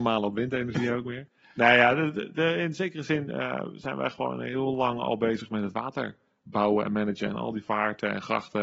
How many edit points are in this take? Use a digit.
0